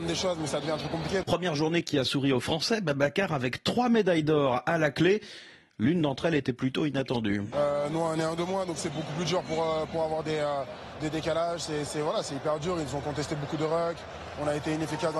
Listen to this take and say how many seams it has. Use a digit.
2